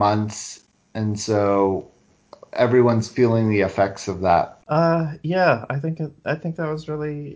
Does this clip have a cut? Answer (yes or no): yes